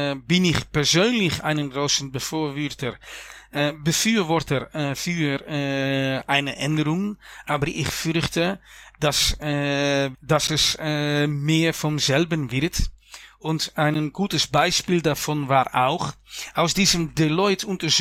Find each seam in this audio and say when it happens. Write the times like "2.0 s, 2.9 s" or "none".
10.1 s